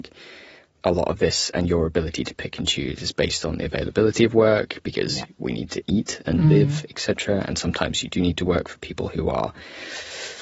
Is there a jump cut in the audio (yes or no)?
no